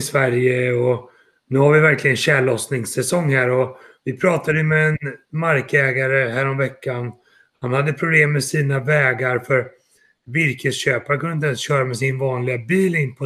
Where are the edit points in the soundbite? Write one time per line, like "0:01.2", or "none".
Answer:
none